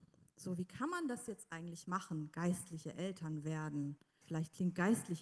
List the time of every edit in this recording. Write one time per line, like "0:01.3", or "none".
0:04.2